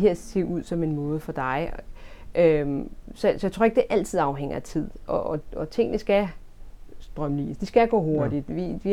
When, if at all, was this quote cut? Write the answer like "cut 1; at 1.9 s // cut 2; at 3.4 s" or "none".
none